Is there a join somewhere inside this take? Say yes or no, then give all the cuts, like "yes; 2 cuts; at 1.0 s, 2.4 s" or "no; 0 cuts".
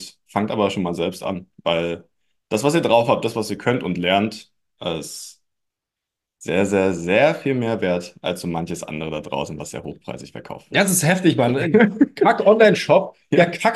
no; 0 cuts